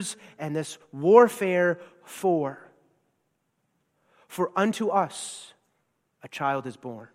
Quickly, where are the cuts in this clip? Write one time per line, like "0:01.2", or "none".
none